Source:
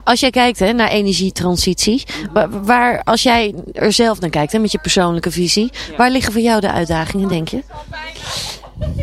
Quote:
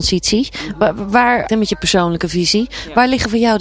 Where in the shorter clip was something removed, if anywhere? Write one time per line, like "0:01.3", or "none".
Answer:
0:01.5